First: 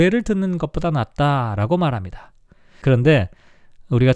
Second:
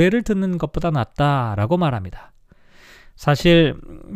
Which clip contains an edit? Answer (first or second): first